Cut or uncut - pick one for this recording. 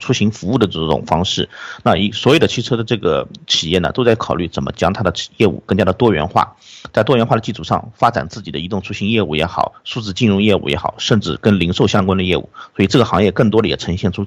uncut